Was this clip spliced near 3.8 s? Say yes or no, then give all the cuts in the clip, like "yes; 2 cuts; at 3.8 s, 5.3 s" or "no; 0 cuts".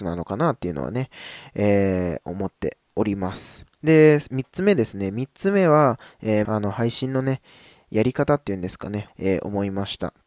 yes; 3 cuts; at 3.8 s, 6.4 s, 9.1 s